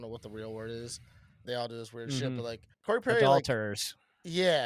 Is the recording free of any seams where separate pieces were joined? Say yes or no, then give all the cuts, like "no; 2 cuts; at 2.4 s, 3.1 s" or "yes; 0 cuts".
no; 2 cuts; at 1.4 s, 2.7 s